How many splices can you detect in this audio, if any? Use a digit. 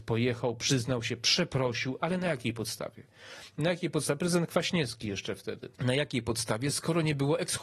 1